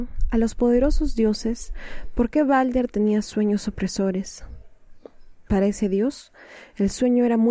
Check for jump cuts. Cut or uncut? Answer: uncut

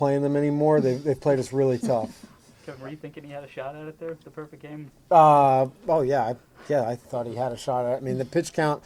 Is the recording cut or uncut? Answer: cut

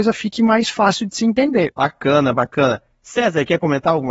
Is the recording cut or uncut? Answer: uncut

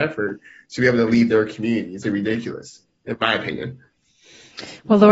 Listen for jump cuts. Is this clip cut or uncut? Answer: cut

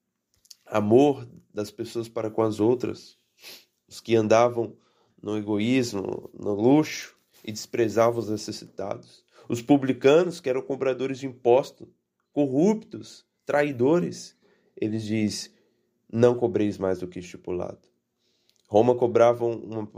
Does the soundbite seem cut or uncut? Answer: uncut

